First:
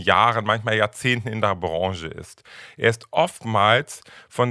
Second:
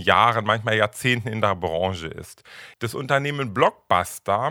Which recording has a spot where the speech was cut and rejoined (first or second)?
second